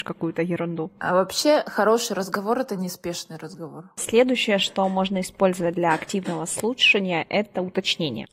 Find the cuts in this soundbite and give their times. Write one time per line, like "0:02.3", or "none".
none